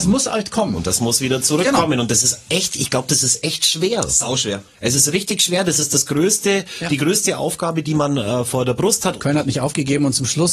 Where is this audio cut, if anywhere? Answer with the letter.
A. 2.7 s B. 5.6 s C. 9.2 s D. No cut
C